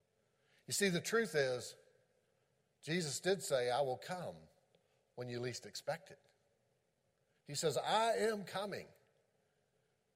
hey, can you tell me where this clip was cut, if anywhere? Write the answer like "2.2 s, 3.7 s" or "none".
7.4 s